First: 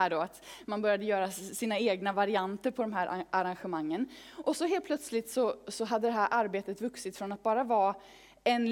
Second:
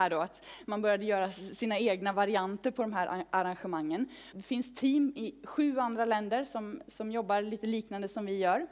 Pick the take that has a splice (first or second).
second